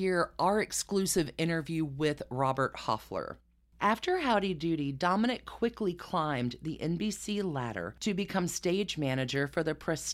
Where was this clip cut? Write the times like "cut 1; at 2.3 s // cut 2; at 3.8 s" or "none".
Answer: cut 1; at 3.7 s